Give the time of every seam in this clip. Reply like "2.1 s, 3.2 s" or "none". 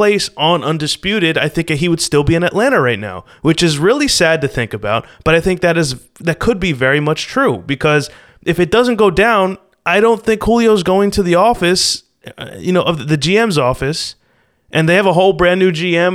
none